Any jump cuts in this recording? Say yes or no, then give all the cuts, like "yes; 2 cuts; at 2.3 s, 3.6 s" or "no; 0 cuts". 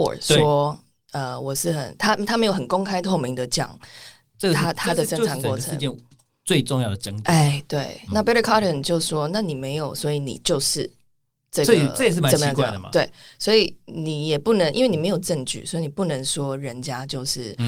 no; 0 cuts